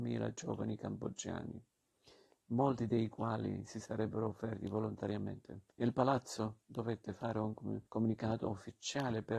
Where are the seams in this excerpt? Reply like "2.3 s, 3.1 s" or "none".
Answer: 5.7 s, 7.9 s